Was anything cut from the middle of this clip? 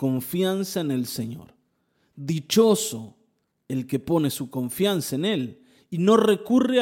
no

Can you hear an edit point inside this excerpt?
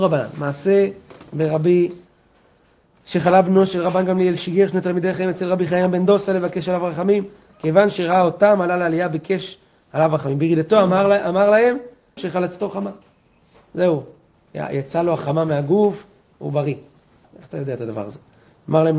yes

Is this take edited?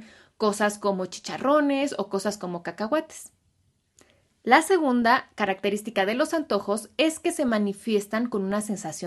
no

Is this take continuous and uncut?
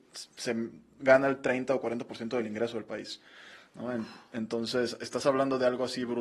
yes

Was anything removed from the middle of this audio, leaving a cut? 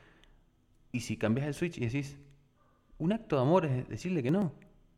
no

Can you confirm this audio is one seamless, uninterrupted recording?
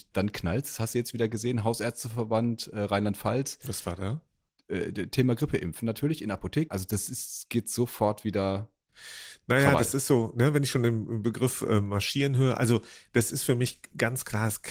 no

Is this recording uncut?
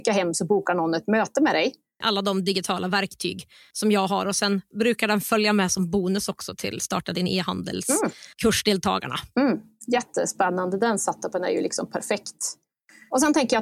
no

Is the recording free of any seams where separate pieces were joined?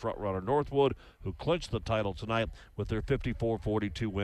yes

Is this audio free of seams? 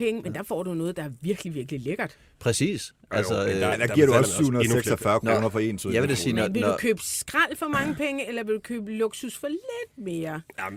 yes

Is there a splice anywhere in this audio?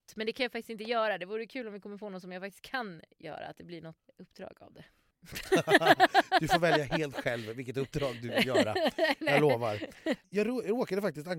no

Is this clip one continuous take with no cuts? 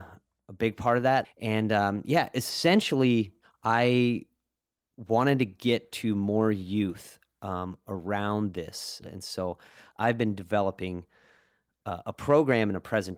no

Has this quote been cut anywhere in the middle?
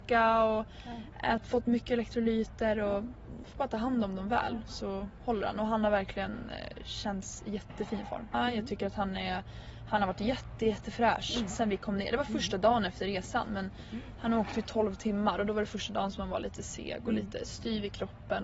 yes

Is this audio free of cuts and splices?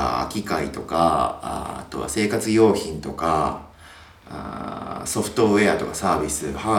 yes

